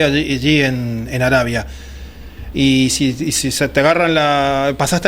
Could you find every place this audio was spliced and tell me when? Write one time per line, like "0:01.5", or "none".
0:02.5